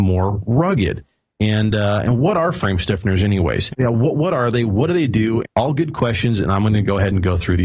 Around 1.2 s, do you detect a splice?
no; 2 cuts; at 3.7 s, 5.4 s

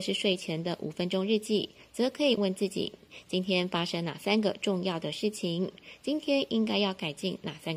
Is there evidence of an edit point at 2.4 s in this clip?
yes; 1 cut; at 2.4 s

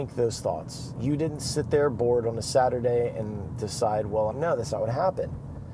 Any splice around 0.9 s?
no; 1 cut; at 4.3 s

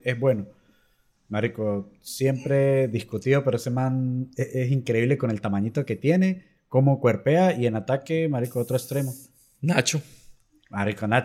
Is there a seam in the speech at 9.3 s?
no; 1 cut; at 1.2 s

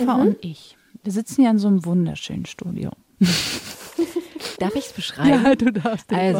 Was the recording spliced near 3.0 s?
no; 1 cut; at 4.6 s

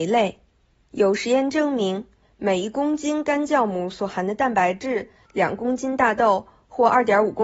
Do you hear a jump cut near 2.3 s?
no; 1 cut; at 5.2 s

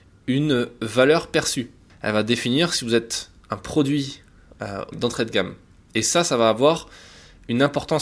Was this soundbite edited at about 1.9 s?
yes; 2 cuts; at 1.9 s, 4.9 s

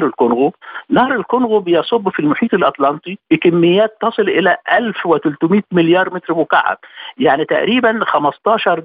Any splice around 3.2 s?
yes; 1 cut; at 3.2 s

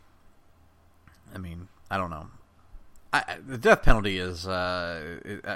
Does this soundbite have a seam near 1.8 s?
yes; 1 cut; at 1.8 s

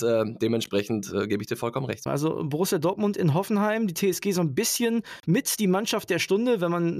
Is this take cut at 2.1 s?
yes; 1 cut; at 2.1 s

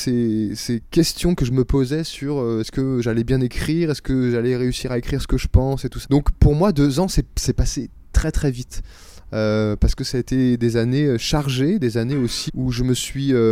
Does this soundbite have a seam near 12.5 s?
yes; 2 cuts; at 6.0 s, 12.5 s

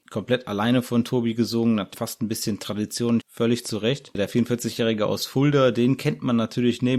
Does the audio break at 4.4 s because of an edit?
no; 2 cuts; at 1.9 s, 3.2 s

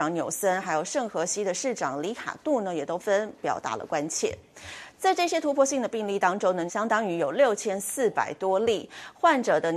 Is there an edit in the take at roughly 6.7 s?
yes; 3 cuts; at 3.0 s, 4.9 s, 6.7 s

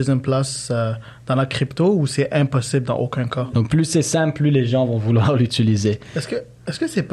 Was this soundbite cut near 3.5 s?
yes; 1 cut; at 3.5 s

